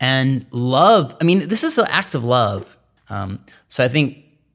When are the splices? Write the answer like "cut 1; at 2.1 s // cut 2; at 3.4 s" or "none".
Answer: cut 1; at 3.0 s